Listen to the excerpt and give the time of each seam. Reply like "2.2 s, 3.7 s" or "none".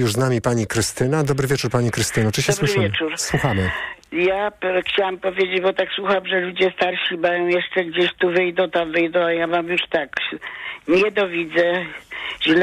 none